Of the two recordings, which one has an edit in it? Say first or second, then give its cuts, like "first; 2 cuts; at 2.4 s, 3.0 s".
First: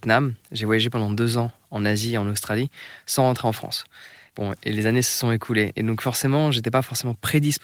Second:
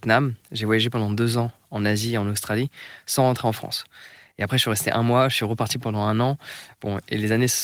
first; 1 cut; at 4.3 s